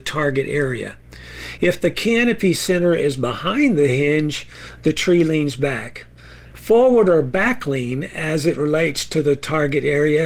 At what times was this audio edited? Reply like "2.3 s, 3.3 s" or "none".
1.6 s, 6.5 s